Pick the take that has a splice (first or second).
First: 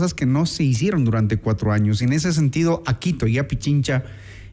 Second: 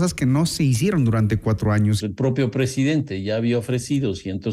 second